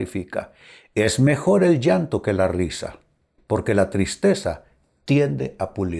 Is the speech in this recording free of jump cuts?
no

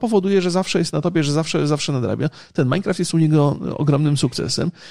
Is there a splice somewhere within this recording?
no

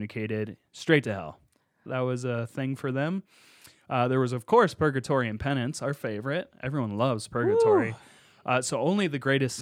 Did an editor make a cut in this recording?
yes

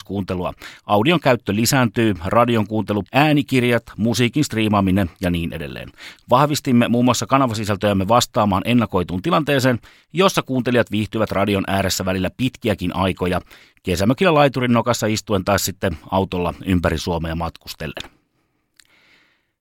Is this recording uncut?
no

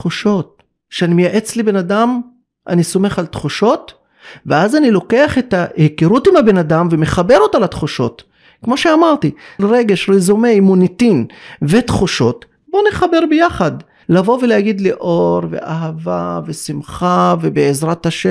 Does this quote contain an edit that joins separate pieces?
yes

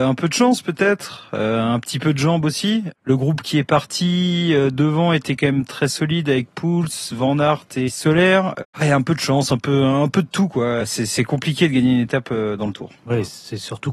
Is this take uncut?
no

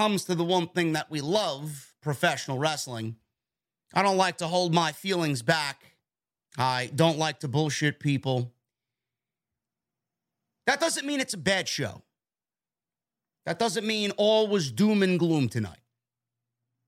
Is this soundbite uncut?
yes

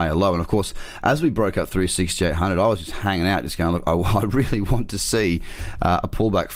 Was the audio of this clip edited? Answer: no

